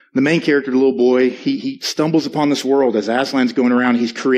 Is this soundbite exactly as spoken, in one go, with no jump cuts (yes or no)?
yes